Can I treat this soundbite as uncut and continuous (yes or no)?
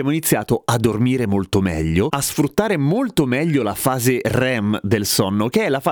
yes